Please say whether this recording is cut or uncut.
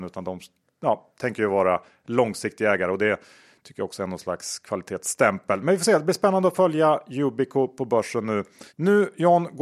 cut